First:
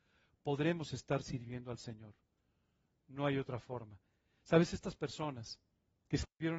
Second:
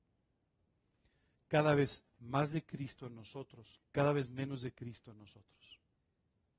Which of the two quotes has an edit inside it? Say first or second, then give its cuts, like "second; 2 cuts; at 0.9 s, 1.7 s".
second; 2 cuts; at 1.3 s, 3.8 s